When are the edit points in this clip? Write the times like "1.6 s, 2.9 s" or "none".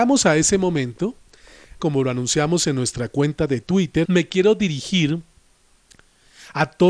1.8 s, 4.0 s